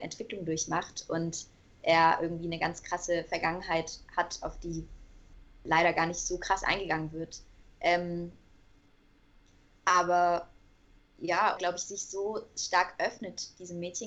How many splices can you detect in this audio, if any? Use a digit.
1